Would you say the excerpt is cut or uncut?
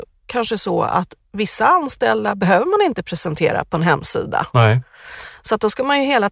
uncut